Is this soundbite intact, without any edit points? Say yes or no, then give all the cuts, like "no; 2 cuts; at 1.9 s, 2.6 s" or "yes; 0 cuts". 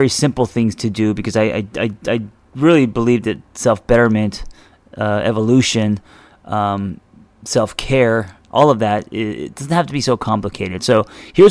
yes; 0 cuts